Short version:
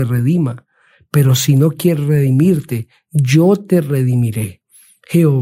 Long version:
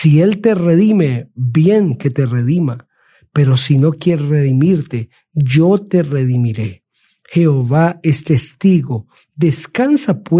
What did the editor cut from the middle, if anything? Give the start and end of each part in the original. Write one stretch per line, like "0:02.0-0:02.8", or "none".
none